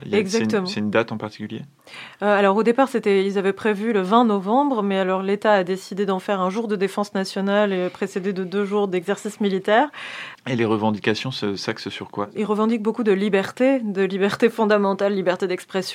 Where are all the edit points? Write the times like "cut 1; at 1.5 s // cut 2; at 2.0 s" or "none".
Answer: cut 1; at 10.4 s